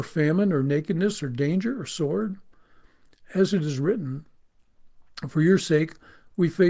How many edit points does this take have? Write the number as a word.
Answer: zero